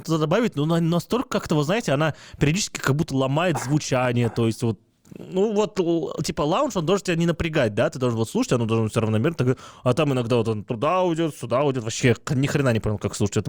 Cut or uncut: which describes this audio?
uncut